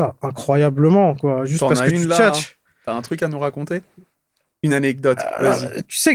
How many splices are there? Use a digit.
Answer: 0